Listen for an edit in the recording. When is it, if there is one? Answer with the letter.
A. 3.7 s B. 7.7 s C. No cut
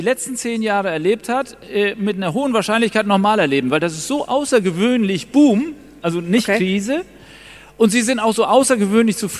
C